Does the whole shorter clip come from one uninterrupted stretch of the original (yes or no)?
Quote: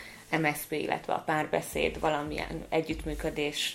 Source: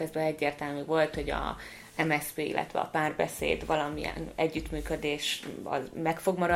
yes